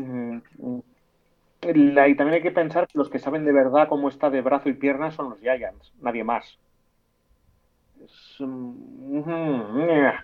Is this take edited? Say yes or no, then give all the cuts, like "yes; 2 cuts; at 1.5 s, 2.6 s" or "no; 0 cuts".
yes; 1 cut; at 7.9 s